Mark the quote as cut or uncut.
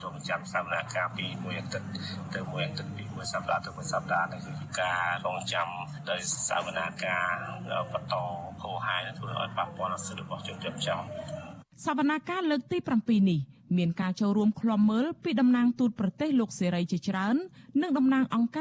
uncut